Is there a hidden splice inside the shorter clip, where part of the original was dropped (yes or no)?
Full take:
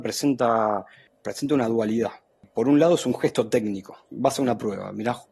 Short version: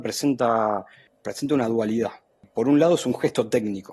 no